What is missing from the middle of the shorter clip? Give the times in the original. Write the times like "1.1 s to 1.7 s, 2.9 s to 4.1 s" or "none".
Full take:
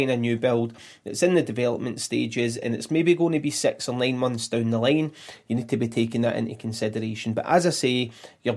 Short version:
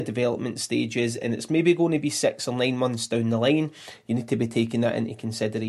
none